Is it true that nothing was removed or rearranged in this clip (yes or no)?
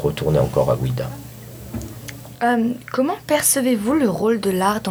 yes